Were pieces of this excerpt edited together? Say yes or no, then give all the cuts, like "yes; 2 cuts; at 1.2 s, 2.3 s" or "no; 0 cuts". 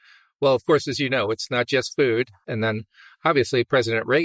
yes; 1 cut; at 2.4 s